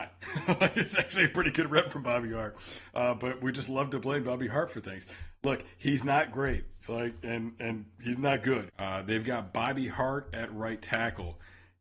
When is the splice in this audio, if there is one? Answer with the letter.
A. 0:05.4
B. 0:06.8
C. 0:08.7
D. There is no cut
C